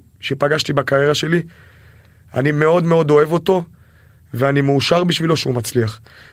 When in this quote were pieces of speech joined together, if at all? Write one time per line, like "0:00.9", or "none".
none